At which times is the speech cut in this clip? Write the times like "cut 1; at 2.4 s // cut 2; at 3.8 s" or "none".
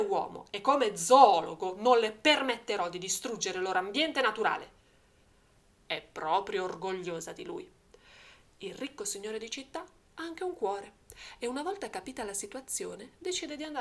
cut 1; at 5.8 s